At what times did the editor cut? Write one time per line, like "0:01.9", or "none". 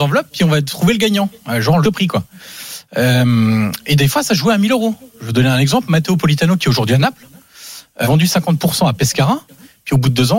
0:01.8
0:08.0